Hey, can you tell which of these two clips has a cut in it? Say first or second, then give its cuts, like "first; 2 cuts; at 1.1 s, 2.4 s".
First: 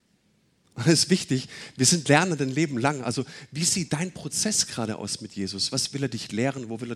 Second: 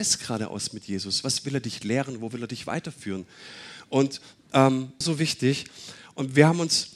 second; 1 cut; at 5.0 s